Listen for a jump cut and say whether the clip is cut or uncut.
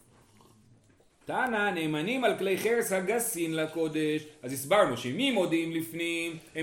cut